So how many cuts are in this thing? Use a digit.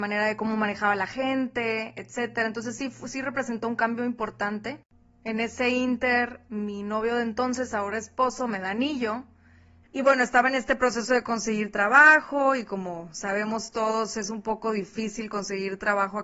1